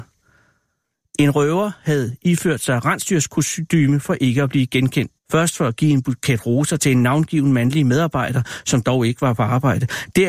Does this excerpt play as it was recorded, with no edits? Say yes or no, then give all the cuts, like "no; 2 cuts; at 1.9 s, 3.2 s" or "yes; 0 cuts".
no; 1 cut; at 5.2 s